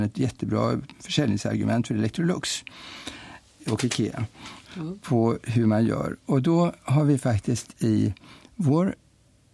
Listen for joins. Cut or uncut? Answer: cut